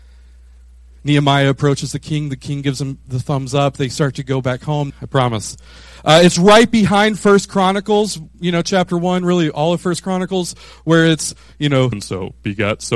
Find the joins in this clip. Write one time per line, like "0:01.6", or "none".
0:04.9
0:11.9